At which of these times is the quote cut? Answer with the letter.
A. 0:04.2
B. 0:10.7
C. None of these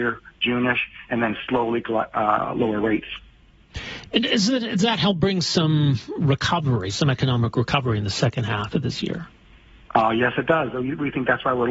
C